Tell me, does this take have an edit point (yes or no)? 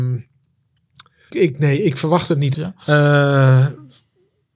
yes